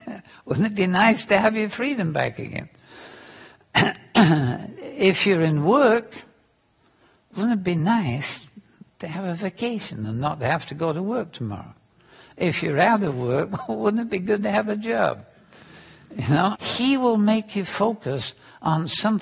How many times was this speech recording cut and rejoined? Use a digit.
1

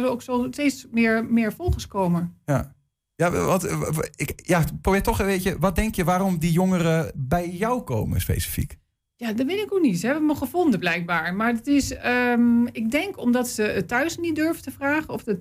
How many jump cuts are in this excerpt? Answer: 0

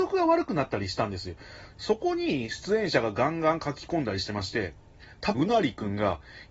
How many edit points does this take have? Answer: 2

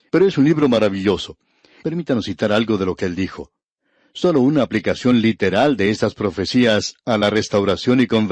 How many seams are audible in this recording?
0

